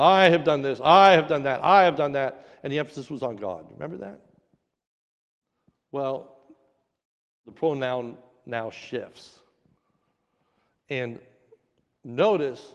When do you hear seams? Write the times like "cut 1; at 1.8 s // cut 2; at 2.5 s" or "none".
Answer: none